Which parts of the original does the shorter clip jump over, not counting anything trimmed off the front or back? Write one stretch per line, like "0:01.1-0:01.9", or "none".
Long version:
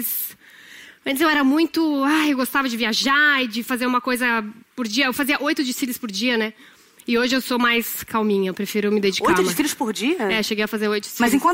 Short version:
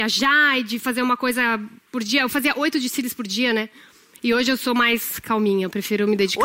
none